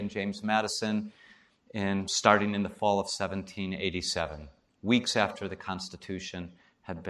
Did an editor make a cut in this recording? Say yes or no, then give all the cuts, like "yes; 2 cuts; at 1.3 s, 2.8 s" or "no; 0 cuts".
no; 0 cuts